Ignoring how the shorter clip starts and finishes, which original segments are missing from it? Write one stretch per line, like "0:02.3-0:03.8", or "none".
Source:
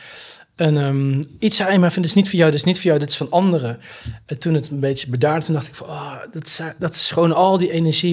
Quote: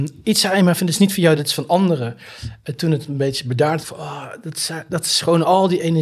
0:02.5-0:03.0
0:05.4-0:05.7